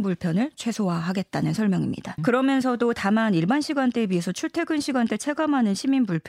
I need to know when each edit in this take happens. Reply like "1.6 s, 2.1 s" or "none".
2.2 s